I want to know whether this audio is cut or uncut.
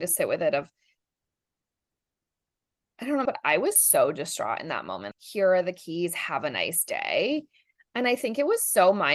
cut